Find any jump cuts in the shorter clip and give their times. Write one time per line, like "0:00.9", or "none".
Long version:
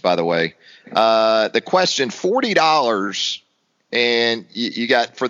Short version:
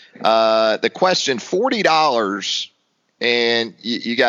none